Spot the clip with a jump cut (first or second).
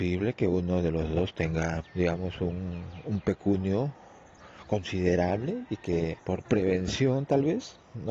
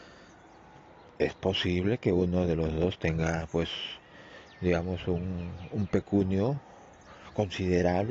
first